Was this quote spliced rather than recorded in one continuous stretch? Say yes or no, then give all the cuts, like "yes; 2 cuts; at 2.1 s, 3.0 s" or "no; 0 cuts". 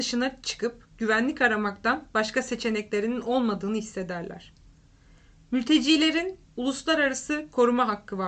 no; 0 cuts